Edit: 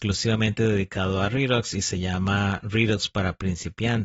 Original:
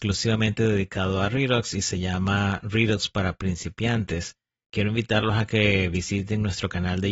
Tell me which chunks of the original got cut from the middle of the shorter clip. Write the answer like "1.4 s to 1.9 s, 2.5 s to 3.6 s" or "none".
none